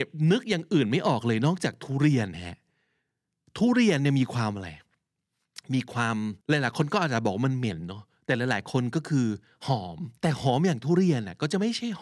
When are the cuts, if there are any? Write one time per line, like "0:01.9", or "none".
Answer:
0:06.4
0:10.2